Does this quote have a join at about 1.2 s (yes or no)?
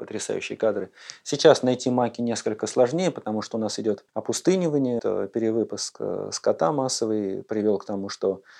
no